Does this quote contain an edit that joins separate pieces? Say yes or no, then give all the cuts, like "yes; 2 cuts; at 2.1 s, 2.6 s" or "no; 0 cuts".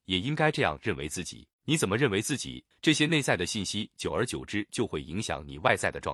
yes; 2 cuts; at 1.5 s, 2.7 s